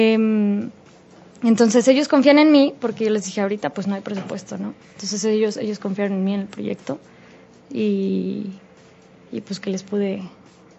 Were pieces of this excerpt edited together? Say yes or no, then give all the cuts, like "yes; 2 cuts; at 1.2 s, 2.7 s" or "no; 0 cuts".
yes; 1 cut; at 9.6 s